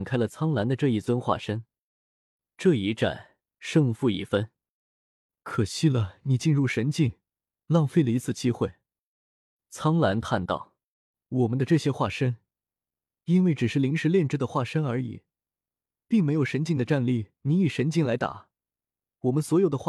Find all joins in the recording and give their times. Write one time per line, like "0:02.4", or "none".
none